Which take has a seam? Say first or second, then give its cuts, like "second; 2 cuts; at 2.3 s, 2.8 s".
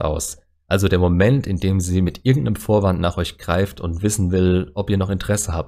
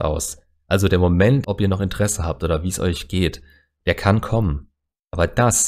second; 1 cut; at 1.4 s